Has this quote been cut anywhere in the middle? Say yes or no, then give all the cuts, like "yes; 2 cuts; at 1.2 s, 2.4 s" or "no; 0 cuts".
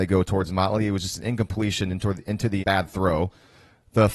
yes; 1 cut; at 2.6 s